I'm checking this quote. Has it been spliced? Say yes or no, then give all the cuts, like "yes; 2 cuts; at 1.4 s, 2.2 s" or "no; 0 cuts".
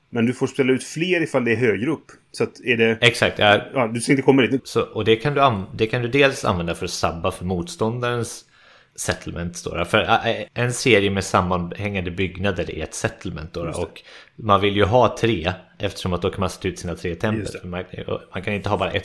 yes; 1 cut; at 4.6 s